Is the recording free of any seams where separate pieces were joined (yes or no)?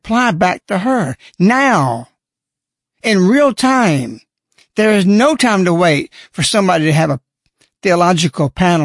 yes